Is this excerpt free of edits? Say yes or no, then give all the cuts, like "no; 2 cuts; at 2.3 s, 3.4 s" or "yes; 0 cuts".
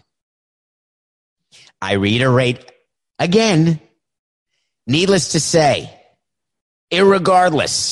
yes; 0 cuts